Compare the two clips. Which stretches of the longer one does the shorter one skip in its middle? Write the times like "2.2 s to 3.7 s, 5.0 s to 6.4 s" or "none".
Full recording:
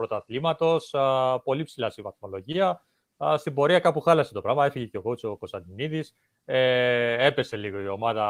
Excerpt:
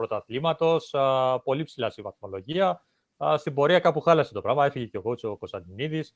none